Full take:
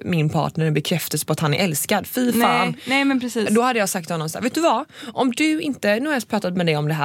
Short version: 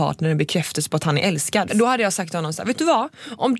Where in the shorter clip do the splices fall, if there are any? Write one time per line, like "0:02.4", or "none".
0:01.7